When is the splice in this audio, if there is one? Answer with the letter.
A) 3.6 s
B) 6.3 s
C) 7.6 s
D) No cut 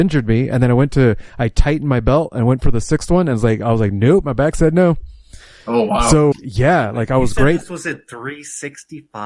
B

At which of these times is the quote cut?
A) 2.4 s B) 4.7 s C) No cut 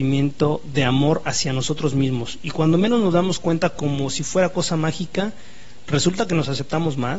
C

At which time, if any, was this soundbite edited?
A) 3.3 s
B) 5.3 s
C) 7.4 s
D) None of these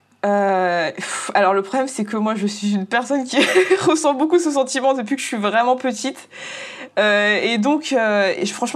D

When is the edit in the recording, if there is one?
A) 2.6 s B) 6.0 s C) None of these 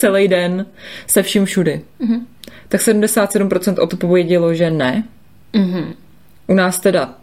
C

